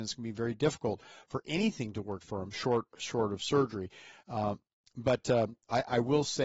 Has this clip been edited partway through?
no; 0 cuts

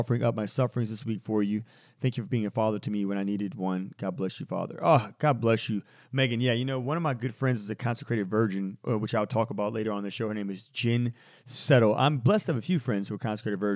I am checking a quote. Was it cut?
no; 0 cuts

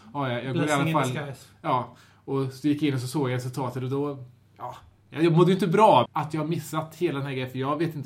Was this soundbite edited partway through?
yes; 1 cut; at 6.0 s

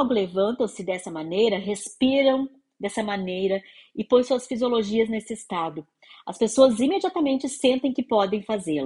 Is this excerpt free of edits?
yes; 0 cuts

